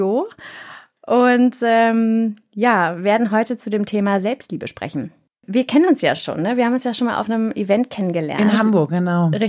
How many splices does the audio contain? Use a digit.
0